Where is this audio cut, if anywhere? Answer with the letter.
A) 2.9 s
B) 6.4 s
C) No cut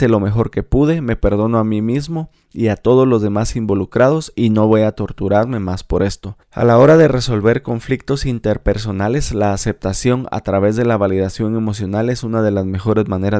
B